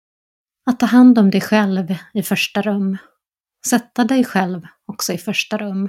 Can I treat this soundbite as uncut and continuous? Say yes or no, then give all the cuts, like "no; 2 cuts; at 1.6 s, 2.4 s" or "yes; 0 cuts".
yes; 0 cuts